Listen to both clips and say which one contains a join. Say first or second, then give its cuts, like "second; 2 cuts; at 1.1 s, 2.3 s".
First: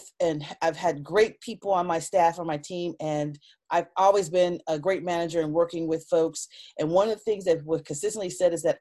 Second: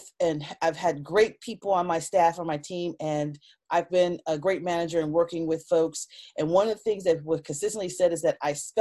second; 1 cut; at 3.9 s